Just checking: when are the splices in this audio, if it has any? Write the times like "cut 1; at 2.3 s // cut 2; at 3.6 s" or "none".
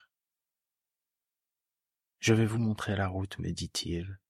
none